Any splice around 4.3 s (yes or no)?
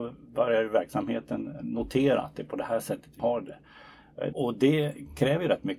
yes